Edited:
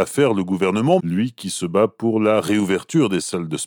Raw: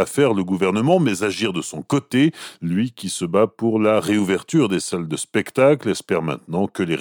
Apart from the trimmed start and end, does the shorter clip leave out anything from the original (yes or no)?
yes